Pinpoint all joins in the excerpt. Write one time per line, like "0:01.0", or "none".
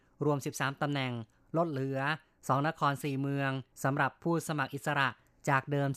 0:03.7